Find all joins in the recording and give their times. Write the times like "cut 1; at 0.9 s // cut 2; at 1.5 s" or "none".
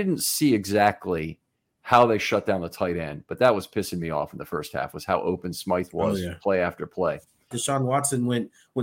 cut 1; at 7.5 s